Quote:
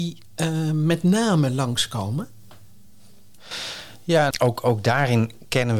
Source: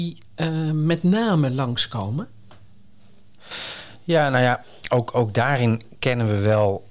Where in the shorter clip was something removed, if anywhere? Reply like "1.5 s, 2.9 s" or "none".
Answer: 4.3 s